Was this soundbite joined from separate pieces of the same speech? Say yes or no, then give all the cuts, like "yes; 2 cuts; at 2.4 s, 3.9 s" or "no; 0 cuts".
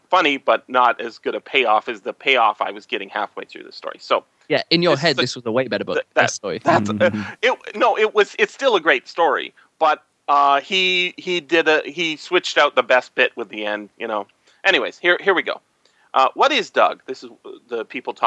no; 0 cuts